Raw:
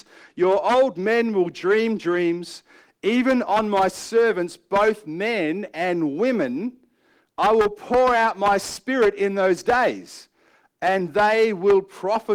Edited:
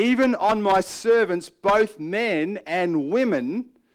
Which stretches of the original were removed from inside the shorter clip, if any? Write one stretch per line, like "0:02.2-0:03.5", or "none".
none